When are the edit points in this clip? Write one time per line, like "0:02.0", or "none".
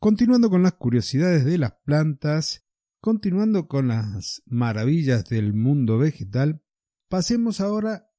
none